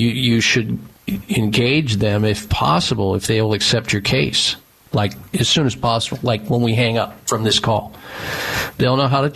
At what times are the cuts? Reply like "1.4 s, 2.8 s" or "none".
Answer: 4.9 s